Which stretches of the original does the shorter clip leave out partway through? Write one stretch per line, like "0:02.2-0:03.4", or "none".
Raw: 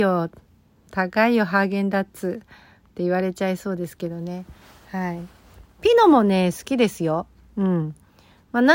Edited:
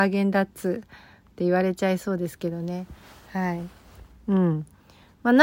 0:05.7-0:07.4